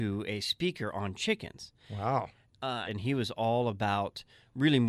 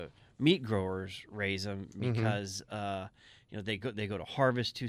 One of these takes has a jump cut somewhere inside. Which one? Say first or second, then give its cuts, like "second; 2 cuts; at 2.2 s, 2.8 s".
first; 1 cut; at 2.8 s